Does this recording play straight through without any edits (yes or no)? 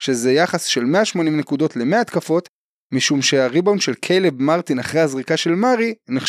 yes